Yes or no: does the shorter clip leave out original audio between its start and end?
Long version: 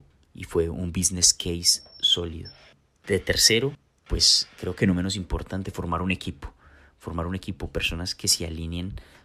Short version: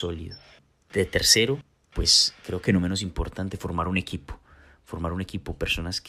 no